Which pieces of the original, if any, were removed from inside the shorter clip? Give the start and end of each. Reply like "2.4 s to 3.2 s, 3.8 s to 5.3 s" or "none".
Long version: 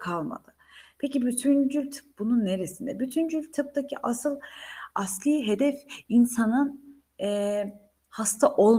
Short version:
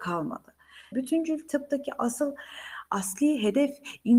0.9 s to 3.0 s